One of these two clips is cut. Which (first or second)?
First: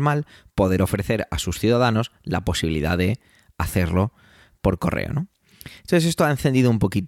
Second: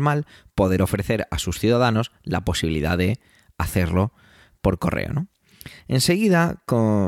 second